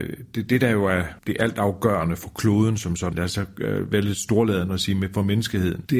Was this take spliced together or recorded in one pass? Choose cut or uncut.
cut